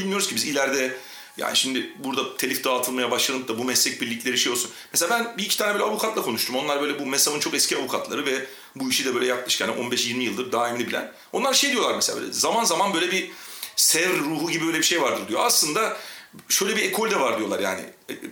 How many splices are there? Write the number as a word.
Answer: zero